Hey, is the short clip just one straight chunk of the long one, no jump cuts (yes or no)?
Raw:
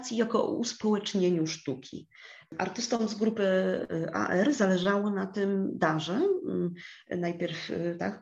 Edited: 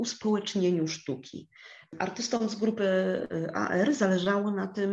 yes